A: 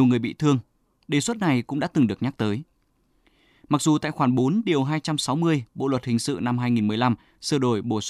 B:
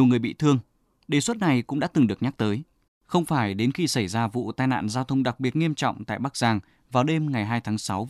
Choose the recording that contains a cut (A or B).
B